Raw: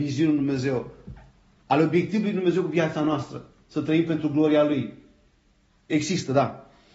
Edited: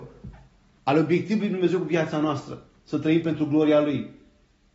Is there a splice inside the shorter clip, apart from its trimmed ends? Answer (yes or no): no